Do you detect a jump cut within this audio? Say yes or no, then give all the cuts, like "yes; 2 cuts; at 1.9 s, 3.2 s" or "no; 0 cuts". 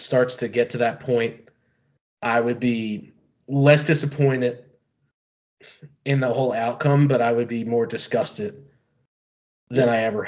no; 0 cuts